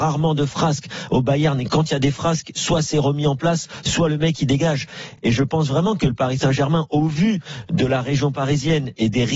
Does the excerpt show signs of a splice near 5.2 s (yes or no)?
no